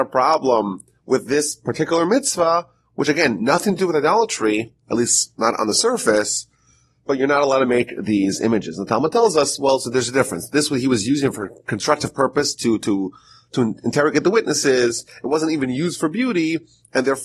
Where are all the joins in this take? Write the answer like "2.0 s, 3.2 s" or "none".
none